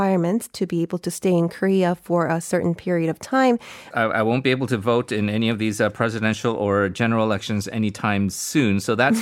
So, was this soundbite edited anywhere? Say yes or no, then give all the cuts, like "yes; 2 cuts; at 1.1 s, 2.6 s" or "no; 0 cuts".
yes; 1 cut; at 3.9 s